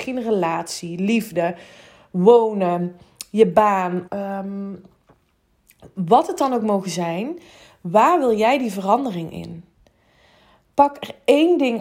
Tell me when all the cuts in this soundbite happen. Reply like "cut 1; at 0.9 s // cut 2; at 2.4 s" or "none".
cut 1; at 4.1 s